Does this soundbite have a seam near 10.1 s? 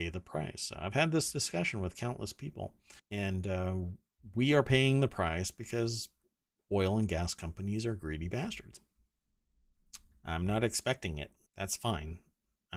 yes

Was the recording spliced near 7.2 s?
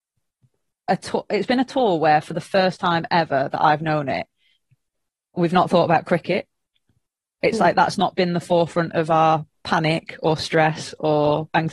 no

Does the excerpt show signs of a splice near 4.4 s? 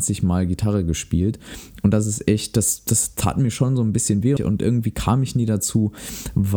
yes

